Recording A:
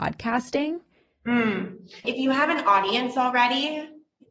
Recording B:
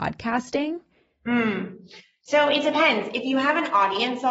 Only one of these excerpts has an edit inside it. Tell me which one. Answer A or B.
A